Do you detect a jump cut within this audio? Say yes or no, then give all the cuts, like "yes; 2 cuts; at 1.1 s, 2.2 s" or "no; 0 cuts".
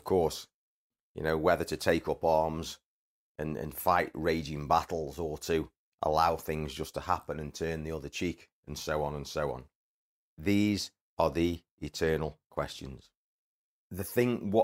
no; 0 cuts